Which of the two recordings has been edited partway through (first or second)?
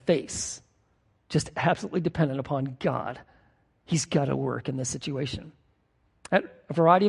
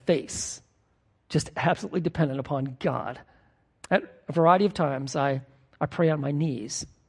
second